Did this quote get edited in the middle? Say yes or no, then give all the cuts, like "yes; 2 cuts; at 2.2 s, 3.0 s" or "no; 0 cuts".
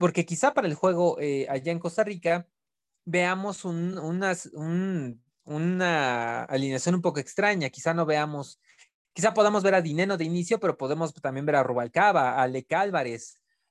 no; 0 cuts